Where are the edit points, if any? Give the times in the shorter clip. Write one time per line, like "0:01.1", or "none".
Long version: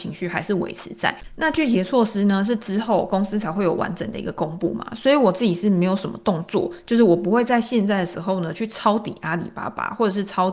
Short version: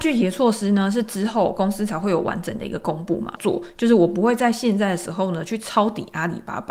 0:03.4

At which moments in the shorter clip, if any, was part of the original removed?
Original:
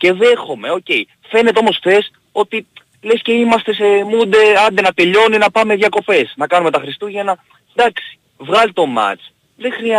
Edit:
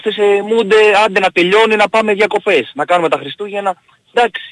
none

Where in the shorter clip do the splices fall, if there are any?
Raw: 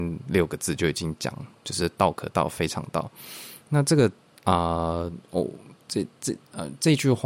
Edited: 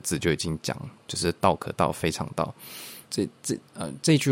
0:03.1

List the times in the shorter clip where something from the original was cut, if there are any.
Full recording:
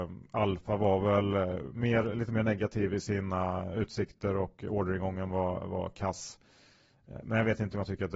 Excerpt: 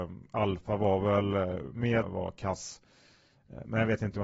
0:02.0

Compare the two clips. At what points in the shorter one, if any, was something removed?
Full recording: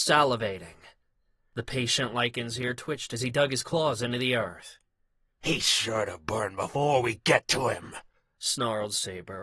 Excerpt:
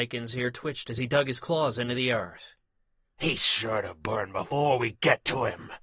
none

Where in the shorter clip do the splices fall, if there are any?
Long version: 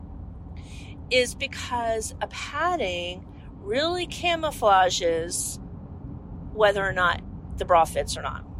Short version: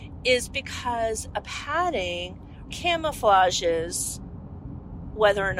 0:02.7

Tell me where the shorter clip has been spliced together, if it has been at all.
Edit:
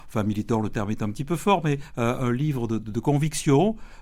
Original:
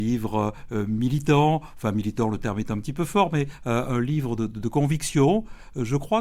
none

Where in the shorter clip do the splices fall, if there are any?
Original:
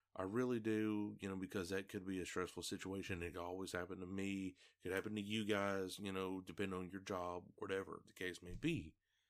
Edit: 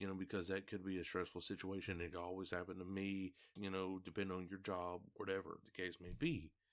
0:03.6

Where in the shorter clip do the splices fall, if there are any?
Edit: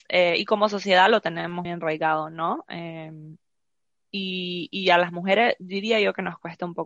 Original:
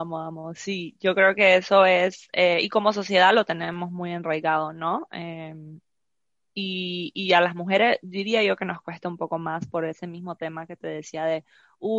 0:01.6

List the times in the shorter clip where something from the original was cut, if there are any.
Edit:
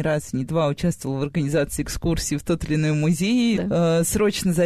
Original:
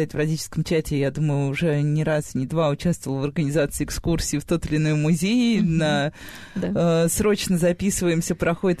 0:03.6

